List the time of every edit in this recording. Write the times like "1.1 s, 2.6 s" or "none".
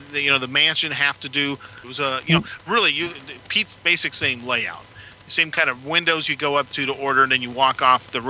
1.8 s, 3.8 s